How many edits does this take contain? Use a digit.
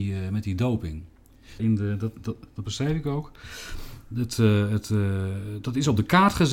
1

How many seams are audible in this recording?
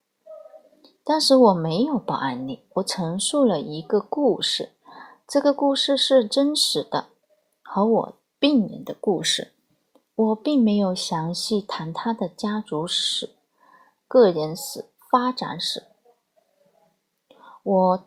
1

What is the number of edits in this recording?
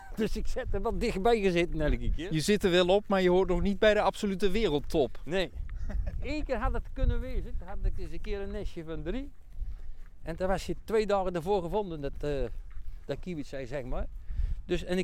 0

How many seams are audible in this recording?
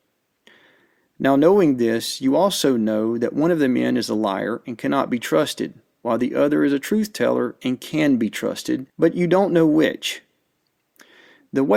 1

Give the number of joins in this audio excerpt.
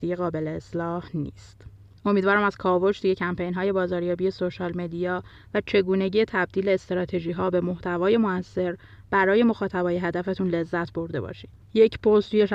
2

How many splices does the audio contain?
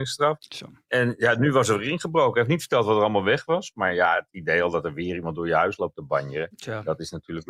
0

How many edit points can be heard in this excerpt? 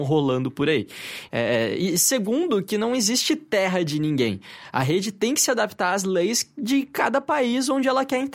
1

